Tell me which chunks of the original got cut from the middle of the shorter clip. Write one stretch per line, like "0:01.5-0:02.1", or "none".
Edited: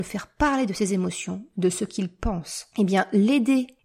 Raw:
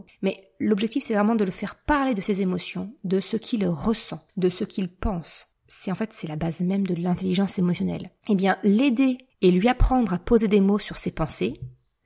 0:03.0-0:04.3
0:05.5-0:08.2